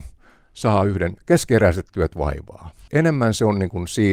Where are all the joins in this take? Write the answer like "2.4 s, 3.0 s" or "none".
2.9 s